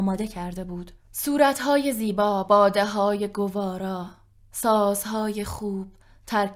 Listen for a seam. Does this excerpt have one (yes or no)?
no